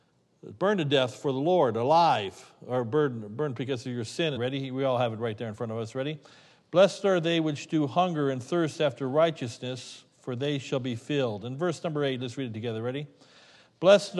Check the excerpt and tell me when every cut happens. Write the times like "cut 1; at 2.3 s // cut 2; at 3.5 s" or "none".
cut 1; at 4.4 s